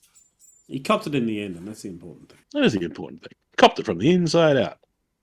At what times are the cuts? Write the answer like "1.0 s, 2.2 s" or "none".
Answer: 2.4 s